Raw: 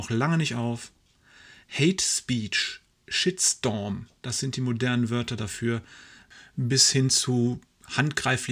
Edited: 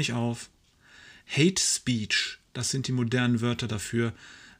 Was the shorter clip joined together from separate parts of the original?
yes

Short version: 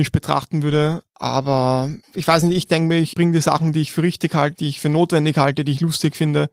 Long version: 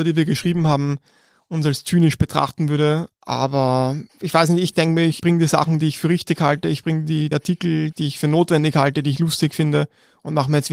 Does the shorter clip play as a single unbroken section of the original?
no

